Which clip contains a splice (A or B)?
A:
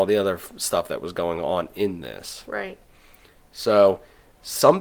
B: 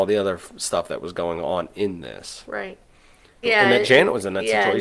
B